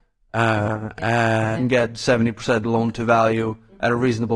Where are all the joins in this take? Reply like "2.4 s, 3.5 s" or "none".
1.5 s

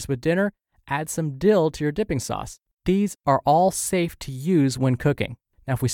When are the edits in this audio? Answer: 2.8 s

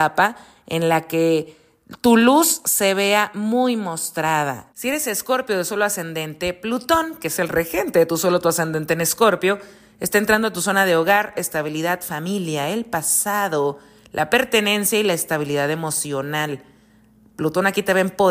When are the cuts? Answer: 4.7 s

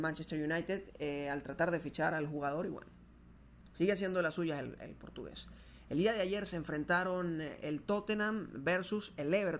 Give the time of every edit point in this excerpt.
none

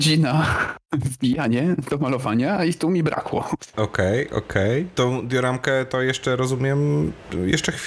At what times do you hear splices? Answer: none

